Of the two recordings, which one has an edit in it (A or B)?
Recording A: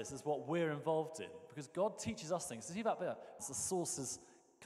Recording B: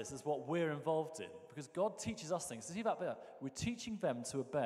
A